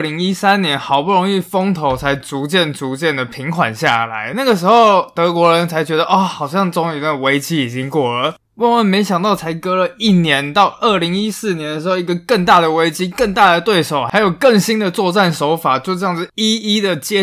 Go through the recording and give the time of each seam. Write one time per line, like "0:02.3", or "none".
none